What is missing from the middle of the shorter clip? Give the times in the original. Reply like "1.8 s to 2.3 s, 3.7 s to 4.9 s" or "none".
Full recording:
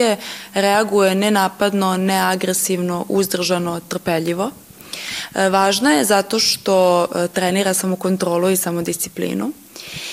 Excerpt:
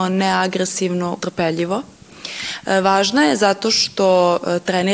3.1 s to 3.9 s

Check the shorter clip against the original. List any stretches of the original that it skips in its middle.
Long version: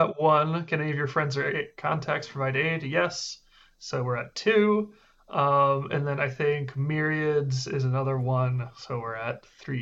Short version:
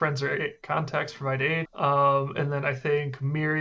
2.8 s to 5.2 s

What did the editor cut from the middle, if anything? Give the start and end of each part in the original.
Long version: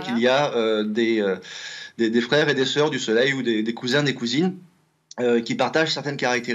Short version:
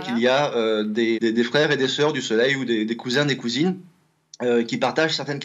1.1 s to 1.9 s

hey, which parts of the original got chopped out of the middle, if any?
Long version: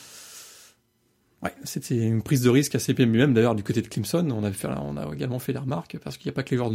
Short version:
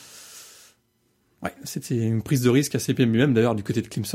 none

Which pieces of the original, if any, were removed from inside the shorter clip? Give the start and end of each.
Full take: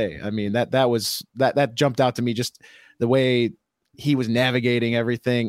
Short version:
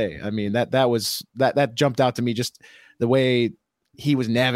none

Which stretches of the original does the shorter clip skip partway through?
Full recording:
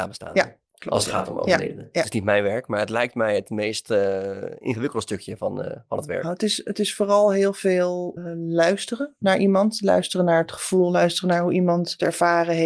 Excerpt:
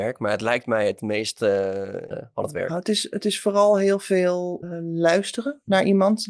4.6 s to 5.6 s

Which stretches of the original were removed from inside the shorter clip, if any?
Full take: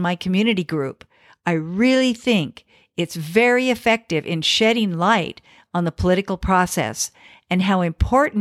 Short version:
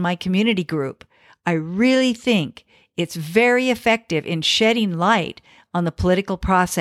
none

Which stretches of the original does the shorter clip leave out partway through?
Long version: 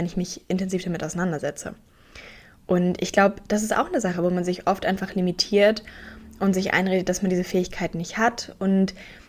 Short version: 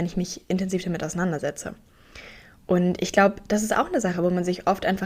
none

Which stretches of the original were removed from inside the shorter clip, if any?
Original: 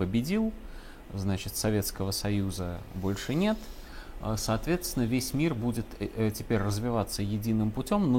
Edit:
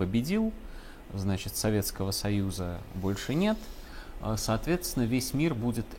none

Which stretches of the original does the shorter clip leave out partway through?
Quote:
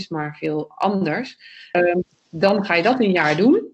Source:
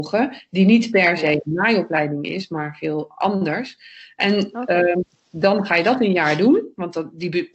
4.1 s to 4.8 s

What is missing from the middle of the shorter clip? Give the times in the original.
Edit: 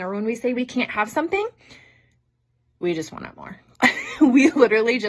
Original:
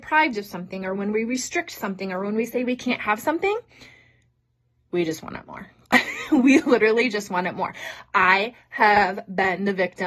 none

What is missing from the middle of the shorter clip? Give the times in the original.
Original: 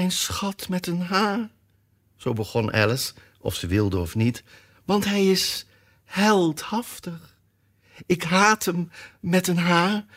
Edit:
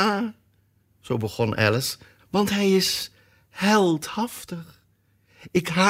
3.3 s to 4.7 s

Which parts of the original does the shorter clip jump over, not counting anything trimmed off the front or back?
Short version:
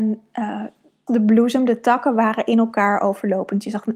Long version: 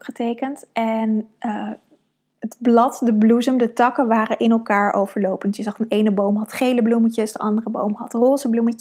2.1 s to 3.0 s

